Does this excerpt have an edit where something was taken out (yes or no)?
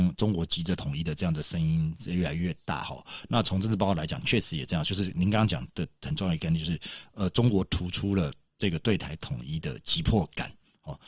no